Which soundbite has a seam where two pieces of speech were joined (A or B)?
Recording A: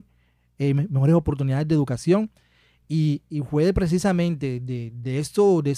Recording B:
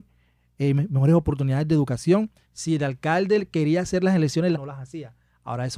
B